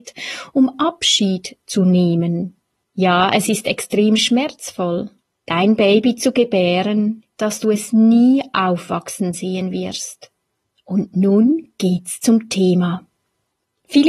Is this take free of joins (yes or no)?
no